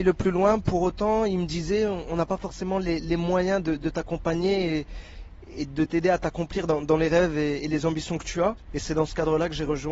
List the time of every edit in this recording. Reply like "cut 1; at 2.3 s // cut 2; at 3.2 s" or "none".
cut 1; at 8.7 s